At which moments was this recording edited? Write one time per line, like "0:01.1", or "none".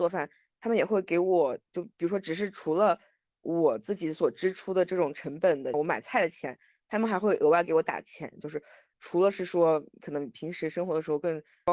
0:05.7
0:08.4